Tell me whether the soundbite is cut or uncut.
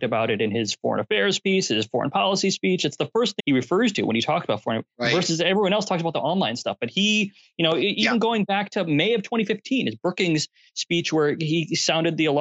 cut